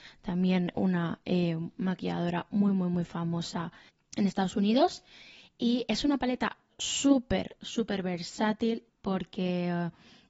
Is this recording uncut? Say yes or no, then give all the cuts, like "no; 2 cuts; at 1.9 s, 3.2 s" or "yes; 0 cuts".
yes; 0 cuts